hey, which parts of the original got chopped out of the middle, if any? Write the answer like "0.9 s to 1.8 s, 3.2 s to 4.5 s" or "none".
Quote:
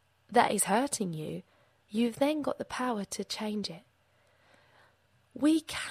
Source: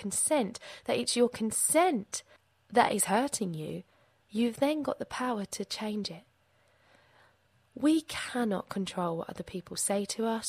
none